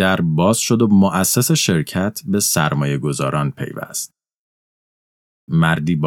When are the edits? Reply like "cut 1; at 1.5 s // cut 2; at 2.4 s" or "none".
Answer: none